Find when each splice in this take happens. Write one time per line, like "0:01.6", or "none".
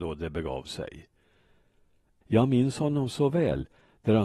0:02.2